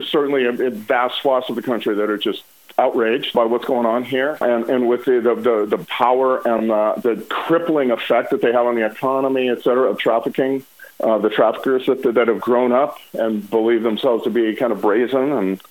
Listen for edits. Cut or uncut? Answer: uncut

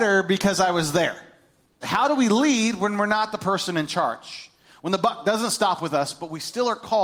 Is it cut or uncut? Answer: cut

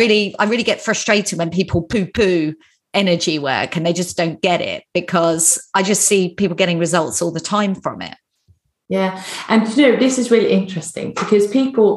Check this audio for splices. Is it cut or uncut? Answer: uncut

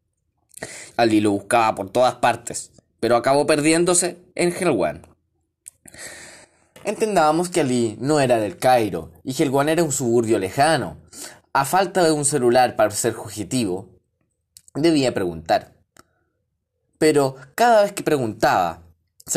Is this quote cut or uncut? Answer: cut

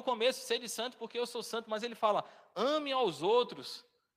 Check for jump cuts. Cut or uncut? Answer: uncut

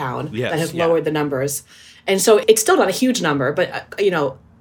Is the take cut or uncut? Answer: uncut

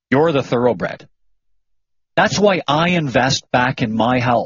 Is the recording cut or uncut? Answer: uncut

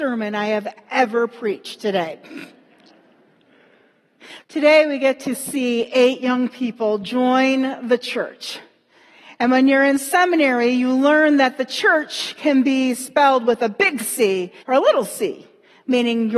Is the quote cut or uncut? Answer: cut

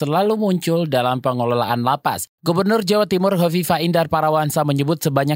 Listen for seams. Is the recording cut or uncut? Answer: cut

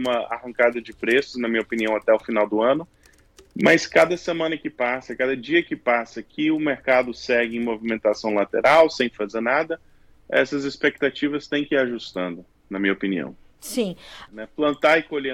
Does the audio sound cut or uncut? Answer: cut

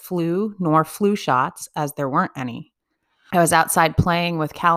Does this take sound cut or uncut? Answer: cut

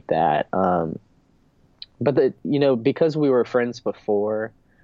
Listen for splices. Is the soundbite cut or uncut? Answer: uncut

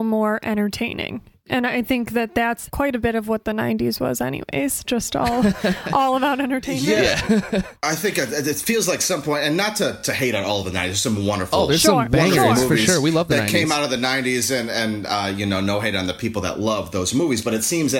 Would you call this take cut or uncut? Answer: uncut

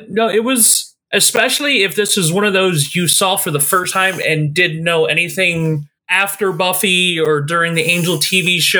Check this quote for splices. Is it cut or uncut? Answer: cut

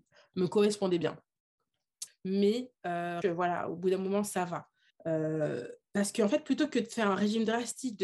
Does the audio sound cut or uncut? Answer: cut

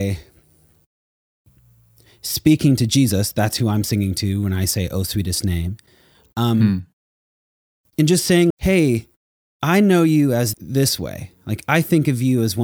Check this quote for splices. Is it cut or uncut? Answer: cut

